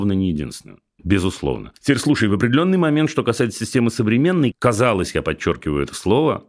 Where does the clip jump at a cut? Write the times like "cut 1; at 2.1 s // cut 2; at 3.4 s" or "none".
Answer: cut 1; at 4.5 s